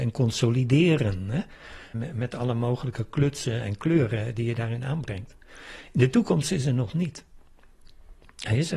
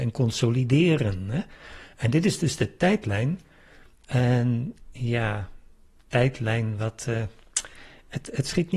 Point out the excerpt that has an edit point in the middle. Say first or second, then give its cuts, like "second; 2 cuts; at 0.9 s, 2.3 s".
first; 1 cut; at 1.9 s